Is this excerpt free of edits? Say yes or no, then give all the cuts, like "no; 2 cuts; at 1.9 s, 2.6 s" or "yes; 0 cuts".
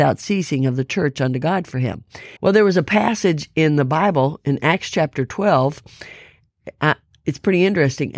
no; 1 cut; at 2.4 s